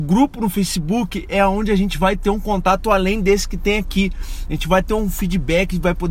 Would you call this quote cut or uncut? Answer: uncut